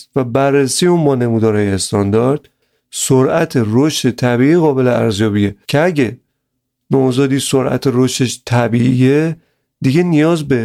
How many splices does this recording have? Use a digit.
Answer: 1